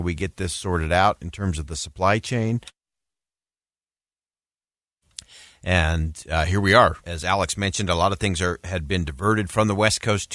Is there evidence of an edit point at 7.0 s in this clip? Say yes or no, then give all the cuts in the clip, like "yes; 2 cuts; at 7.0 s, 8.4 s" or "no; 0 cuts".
yes; 1 cut; at 7.0 s